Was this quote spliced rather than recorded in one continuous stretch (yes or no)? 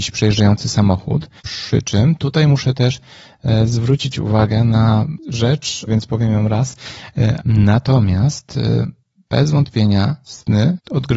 yes